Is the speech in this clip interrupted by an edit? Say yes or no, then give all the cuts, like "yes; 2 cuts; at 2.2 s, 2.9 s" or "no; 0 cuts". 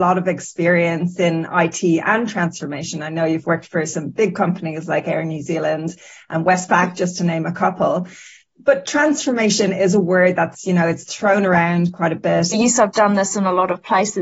yes; 1 cut; at 12.5 s